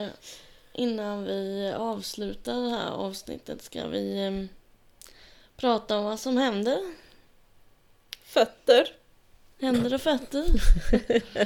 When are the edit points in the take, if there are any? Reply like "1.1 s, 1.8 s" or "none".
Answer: none